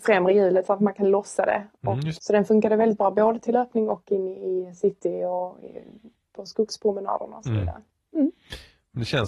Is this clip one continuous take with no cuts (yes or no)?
no